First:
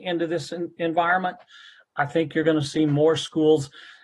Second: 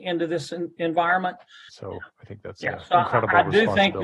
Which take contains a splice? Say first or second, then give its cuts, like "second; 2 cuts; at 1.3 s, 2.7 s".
second; 1 cut; at 1.7 s